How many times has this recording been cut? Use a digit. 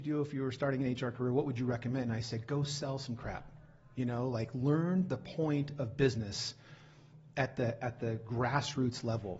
0